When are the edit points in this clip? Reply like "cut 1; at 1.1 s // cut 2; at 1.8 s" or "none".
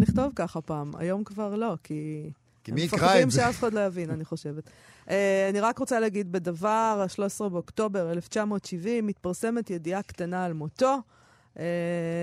none